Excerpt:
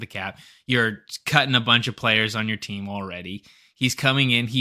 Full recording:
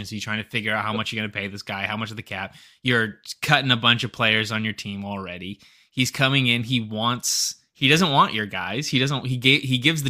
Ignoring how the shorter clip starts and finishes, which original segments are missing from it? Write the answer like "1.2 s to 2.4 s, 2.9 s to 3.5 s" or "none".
none

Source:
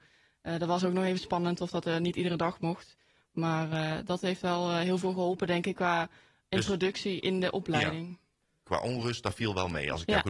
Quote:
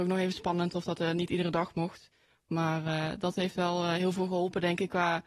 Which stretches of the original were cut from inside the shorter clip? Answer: none

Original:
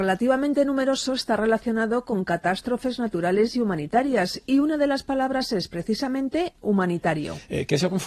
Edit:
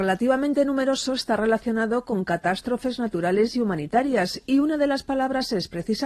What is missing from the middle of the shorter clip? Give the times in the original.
none

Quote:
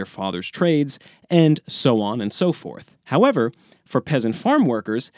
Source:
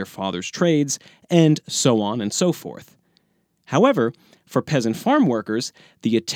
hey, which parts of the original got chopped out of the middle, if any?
3.0 s to 3.6 s

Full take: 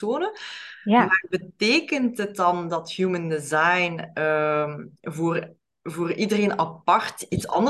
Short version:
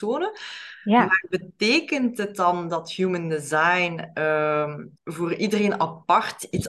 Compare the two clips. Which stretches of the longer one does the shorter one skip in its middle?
5.0 s to 5.8 s

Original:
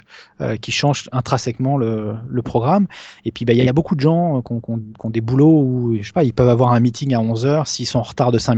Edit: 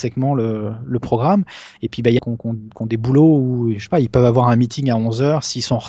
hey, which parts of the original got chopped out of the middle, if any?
3.6 s to 4.4 s

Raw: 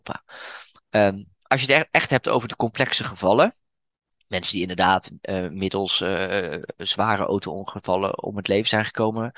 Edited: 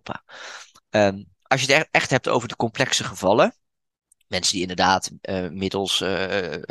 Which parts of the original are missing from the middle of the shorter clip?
none

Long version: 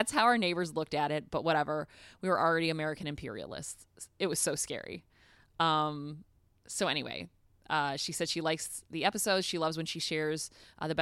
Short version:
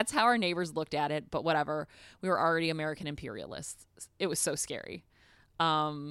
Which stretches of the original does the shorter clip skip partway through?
none

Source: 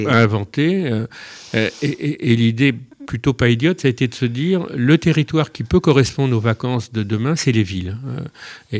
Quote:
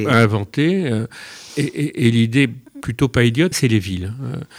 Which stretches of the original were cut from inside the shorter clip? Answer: 1.5 s to 1.7 s, 3.8 s to 7.4 s

